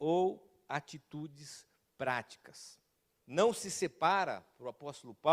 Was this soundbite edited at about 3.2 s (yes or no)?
yes